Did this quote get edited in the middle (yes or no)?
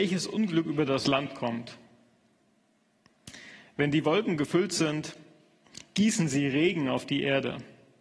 no